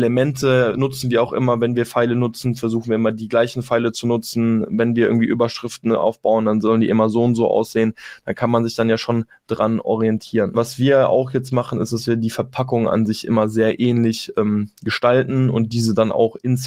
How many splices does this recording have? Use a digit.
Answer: 1